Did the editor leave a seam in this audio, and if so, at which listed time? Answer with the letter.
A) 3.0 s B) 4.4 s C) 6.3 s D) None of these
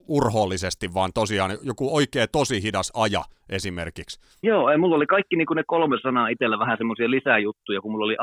B